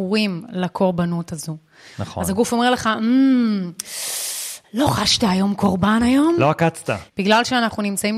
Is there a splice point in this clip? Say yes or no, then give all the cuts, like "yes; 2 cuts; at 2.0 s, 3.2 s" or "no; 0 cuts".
yes; 2 cuts; at 1.9 s, 7.1 s